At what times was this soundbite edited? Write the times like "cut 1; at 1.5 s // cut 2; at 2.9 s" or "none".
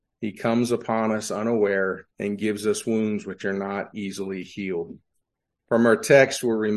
cut 1; at 2.1 s